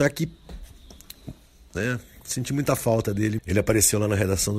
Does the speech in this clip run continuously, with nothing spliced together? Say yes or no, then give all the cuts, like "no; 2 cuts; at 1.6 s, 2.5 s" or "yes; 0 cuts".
no; 1 cut; at 3.4 s